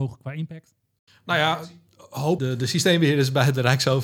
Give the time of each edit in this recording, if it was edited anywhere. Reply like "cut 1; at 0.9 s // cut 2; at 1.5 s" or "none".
cut 1; at 2.4 s